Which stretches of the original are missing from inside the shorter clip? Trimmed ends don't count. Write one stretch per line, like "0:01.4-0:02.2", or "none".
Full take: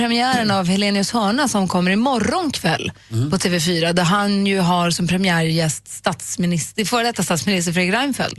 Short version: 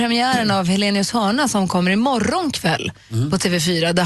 none